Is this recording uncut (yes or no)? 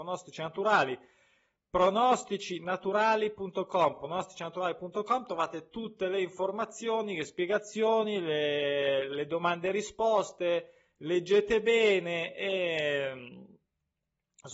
yes